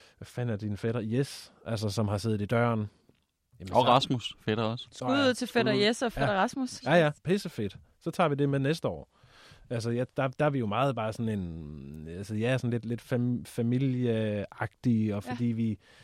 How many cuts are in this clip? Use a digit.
1